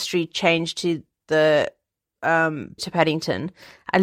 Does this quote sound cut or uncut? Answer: cut